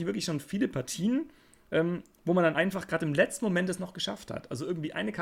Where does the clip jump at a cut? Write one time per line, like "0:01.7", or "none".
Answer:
none